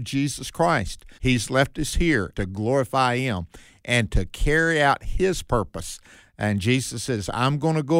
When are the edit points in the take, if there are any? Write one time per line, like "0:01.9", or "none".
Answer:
0:01.2
0:02.3